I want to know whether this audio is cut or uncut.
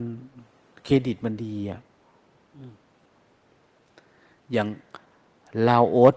uncut